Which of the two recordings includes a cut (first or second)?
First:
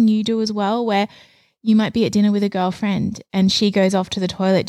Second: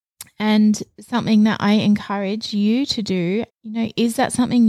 second